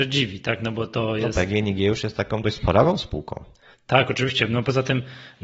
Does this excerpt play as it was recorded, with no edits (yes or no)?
yes